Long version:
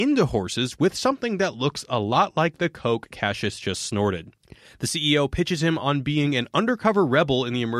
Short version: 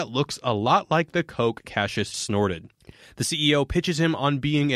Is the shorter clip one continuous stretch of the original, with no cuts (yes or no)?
no